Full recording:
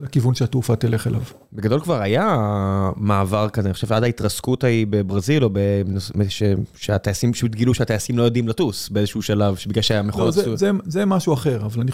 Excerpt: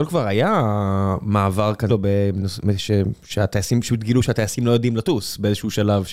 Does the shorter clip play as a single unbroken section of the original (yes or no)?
no